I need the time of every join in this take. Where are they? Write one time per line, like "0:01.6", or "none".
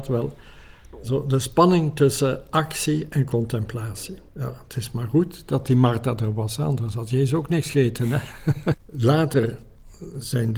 0:04.3
0:08.7